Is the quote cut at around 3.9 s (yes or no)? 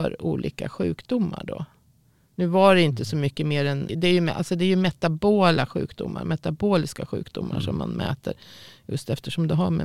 yes